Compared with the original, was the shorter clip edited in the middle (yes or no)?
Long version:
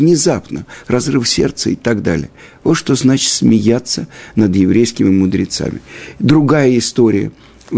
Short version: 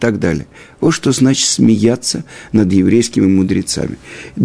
no